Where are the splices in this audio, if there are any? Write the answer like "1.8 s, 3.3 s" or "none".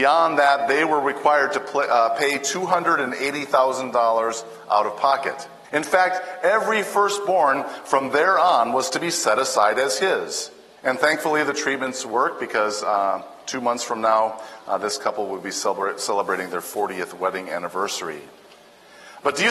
5.6 s, 10.8 s